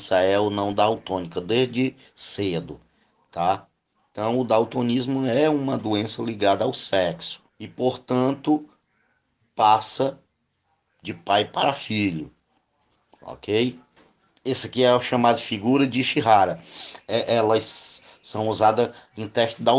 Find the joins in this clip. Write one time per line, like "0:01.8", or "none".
0:07.5
0:14.3